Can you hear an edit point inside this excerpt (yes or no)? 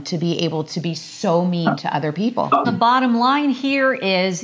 yes